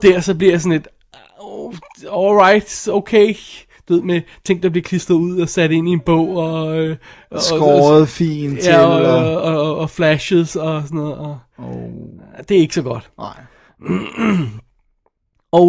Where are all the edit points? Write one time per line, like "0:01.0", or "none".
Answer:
none

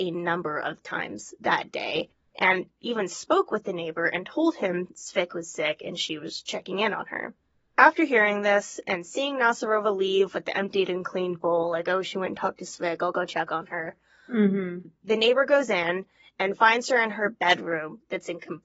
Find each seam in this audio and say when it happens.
none

